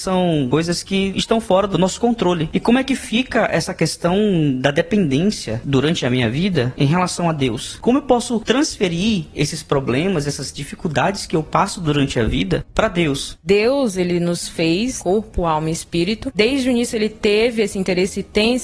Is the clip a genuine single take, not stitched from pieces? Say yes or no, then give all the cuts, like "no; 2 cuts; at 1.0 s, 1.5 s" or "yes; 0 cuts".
yes; 0 cuts